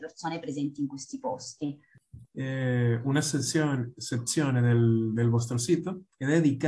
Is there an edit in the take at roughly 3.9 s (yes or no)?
no